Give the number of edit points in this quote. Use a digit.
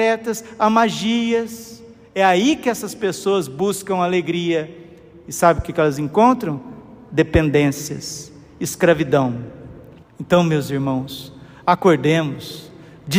1